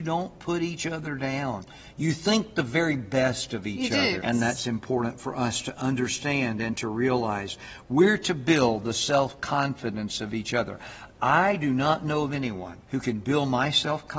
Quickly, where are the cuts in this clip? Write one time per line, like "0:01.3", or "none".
0:04.2
0:12.8